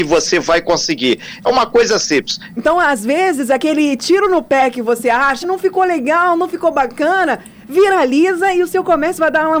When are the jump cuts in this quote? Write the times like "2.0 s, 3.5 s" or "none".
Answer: 2.6 s, 5.4 s